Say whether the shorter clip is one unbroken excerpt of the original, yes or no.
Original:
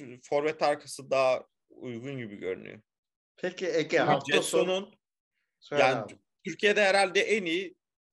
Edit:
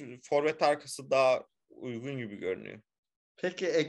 yes